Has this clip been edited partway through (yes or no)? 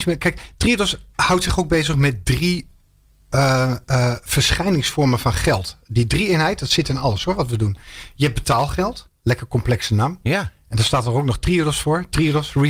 yes